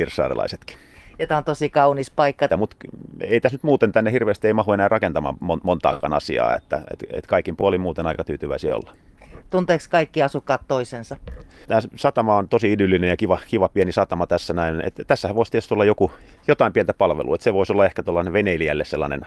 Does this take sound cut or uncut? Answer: cut